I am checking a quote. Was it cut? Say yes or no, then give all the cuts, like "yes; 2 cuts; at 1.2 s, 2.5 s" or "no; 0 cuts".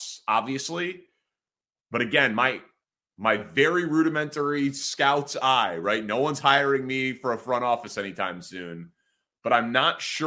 no; 0 cuts